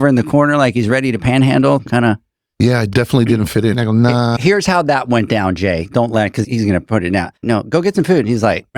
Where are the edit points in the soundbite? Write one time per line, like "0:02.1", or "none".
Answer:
0:03.7
0:07.4